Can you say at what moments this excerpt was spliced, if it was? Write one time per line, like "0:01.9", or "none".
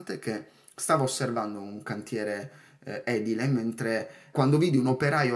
0:04.3